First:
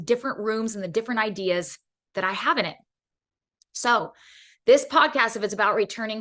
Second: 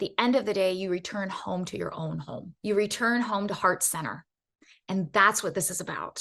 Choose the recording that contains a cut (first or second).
second